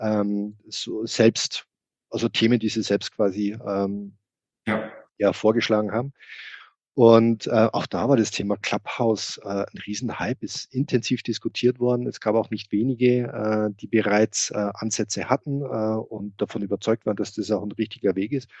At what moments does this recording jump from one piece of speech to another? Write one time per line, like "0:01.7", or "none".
none